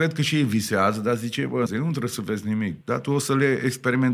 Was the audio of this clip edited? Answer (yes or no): yes